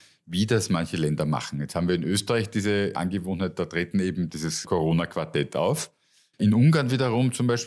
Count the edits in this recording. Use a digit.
1